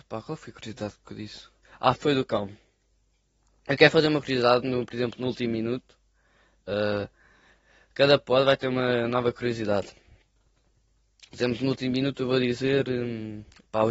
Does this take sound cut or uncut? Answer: cut